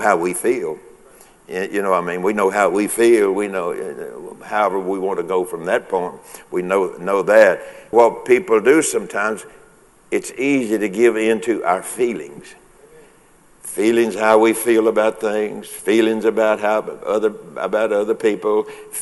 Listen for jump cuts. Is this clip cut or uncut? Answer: cut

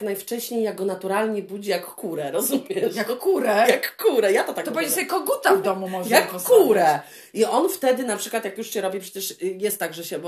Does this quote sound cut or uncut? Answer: uncut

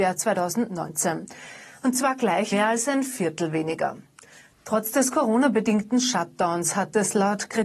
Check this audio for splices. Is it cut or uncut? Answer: cut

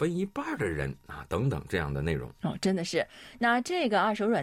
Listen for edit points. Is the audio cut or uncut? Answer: uncut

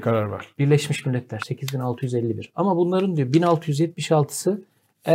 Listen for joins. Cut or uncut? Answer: cut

